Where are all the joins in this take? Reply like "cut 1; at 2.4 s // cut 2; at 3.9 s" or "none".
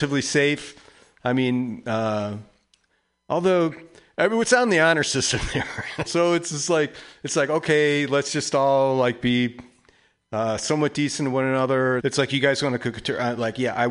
cut 1; at 6.0 s // cut 2; at 12.0 s